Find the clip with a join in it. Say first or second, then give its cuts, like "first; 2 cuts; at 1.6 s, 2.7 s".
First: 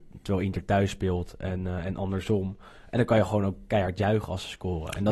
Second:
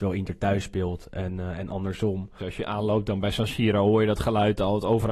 second; 1 cut; at 2.4 s